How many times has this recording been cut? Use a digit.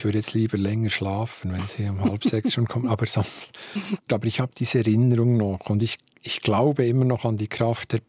1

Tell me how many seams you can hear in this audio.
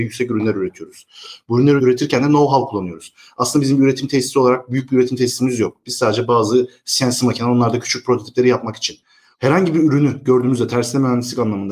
2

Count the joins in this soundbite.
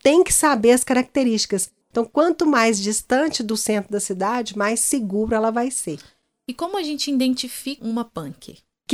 2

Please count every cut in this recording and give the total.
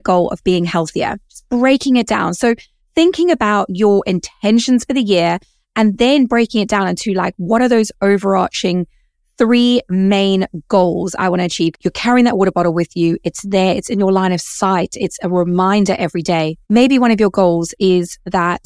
3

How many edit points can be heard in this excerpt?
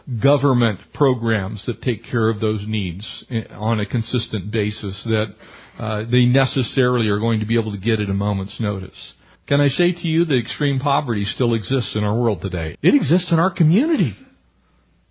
2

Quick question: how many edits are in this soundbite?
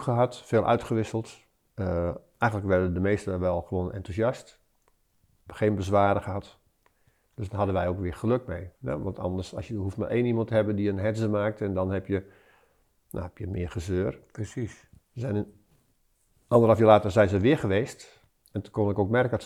1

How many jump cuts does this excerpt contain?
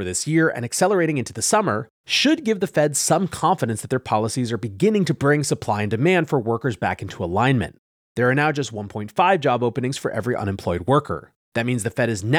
1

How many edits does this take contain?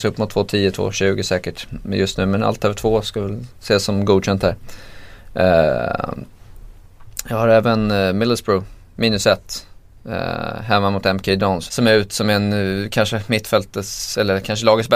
1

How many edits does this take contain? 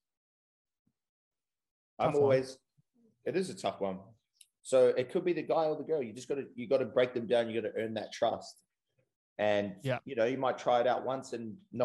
1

